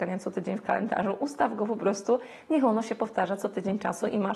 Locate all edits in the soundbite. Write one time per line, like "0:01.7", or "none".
none